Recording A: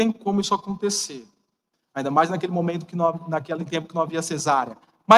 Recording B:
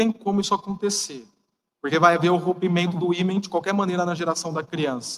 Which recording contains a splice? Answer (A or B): A